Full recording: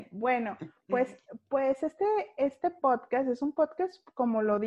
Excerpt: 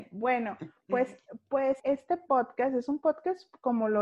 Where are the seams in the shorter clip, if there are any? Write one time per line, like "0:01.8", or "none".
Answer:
0:01.8